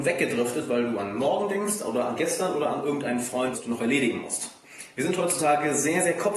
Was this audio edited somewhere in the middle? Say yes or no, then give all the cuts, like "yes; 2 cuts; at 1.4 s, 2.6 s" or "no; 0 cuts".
yes; 1 cut; at 3.5 s